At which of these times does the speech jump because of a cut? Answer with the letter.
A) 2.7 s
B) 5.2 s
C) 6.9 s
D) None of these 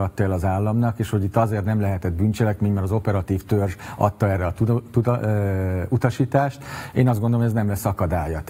D